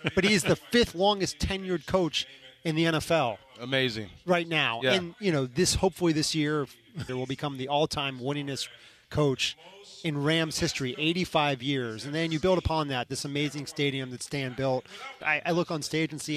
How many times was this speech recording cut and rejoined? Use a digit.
2